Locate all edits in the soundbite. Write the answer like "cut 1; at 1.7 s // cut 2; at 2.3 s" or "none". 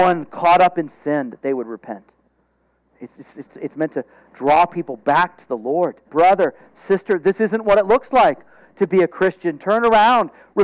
cut 1; at 3.5 s // cut 2; at 6.1 s